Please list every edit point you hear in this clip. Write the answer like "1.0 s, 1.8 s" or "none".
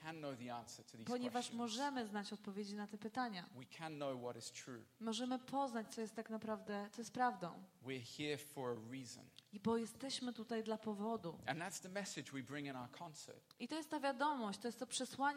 none

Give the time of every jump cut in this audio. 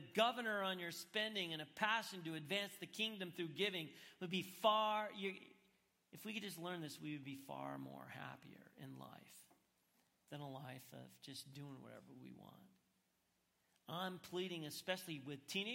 none

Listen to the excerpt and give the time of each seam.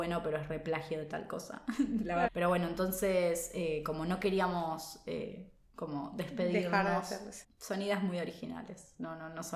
2.3 s, 7.4 s

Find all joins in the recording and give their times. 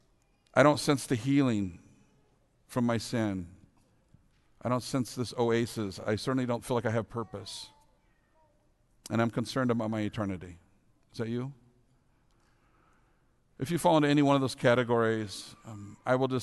none

